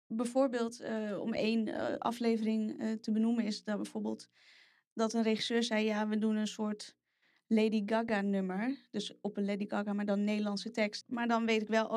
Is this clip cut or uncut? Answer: cut